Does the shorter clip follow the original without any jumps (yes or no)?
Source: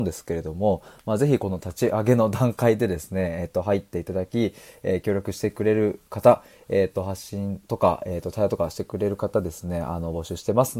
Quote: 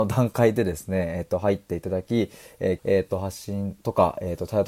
no